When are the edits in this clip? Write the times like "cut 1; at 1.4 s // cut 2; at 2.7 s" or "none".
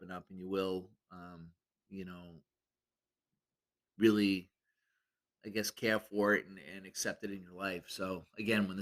none